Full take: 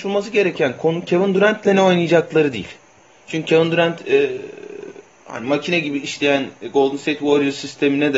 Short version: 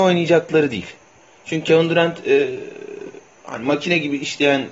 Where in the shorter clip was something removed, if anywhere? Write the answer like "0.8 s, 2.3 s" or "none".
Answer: none